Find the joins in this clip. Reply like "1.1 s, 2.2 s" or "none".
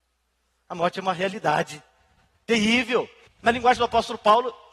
3.3 s